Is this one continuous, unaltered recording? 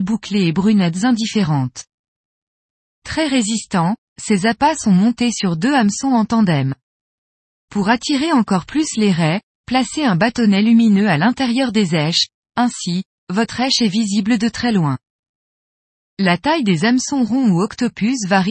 yes; 0 cuts

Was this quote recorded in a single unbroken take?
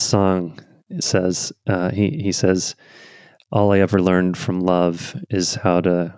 yes; 0 cuts

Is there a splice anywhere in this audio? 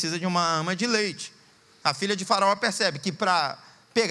yes; 1 cut; at 1.8 s

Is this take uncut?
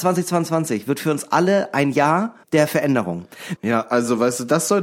no; 2 cuts; at 2.4 s, 3.6 s

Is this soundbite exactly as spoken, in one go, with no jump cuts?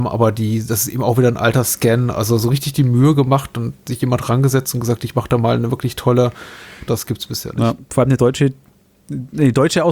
no; 1 cut; at 6.9 s

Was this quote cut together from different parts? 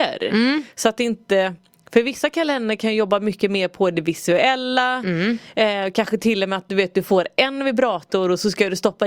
no; 0 cuts

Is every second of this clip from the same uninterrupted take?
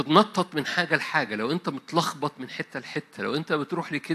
yes; 0 cuts

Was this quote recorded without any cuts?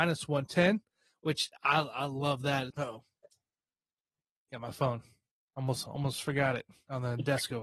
no; 1 cut; at 2.7 s

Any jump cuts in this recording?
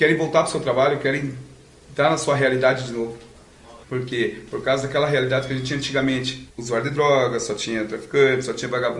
yes; 2 cuts; at 3.8 s, 6.5 s

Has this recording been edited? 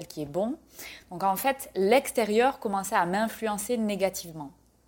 no; 0 cuts

